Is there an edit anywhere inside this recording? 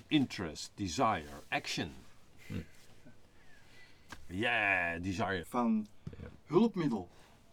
yes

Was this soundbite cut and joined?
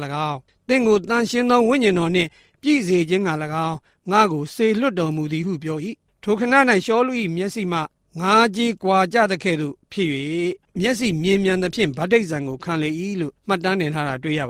no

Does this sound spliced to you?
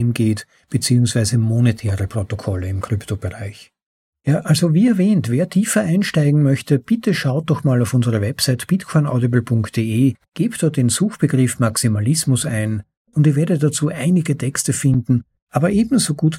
no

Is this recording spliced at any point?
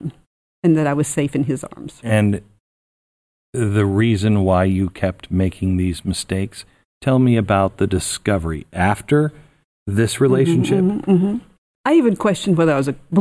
yes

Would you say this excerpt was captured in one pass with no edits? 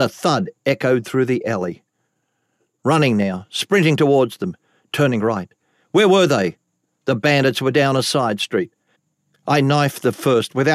yes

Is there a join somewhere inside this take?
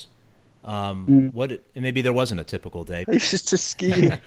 yes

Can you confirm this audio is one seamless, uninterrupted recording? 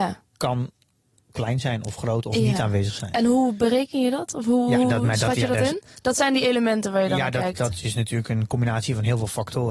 yes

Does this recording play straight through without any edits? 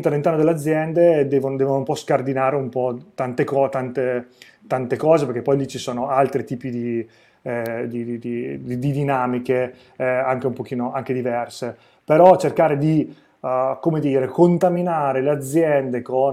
yes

